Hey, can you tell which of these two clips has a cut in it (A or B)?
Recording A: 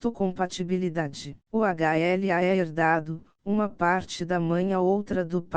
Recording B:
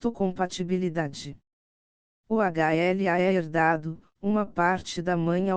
A